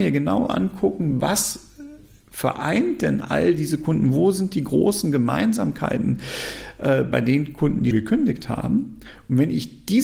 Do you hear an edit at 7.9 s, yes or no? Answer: yes